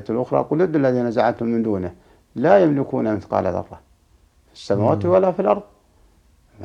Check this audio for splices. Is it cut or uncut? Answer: uncut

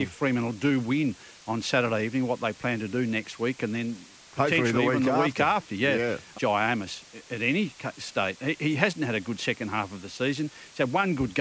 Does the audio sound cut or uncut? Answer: cut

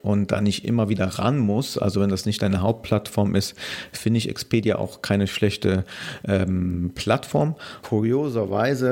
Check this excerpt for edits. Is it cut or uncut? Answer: cut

